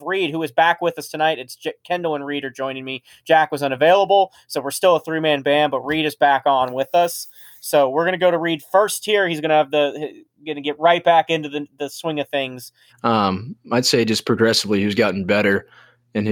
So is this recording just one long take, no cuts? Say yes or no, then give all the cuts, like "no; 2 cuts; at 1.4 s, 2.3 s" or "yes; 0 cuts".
no; 1 cut; at 12.9 s